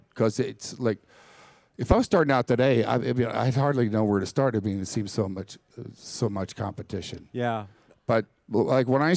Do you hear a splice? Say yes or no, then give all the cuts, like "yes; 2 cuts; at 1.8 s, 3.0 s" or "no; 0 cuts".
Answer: no; 0 cuts